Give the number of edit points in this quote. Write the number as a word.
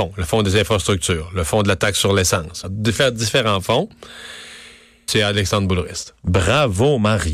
two